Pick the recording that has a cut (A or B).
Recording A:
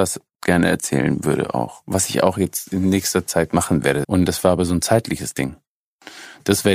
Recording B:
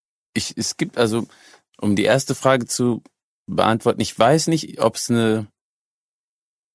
A